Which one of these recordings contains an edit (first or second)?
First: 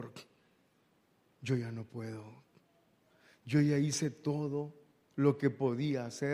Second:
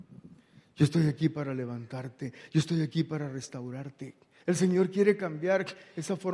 second